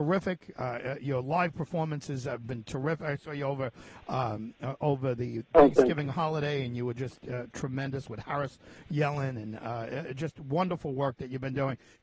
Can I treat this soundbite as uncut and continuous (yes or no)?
yes